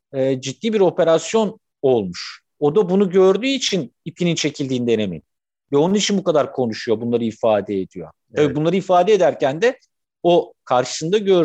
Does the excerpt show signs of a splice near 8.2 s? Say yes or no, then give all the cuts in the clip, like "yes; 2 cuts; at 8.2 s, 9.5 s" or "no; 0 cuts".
no; 1 cut; at 2.5 s